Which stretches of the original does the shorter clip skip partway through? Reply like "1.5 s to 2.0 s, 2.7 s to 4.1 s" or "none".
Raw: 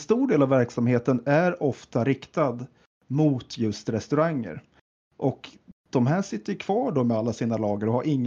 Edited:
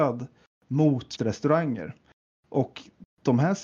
3.6 s to 3.8 s